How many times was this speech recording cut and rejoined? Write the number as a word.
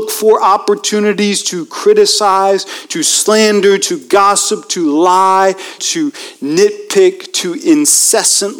one